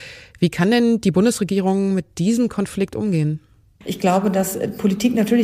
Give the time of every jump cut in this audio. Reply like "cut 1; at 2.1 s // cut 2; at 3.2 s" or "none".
none